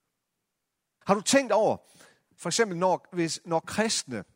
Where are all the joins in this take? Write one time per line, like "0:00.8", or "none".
0:01.0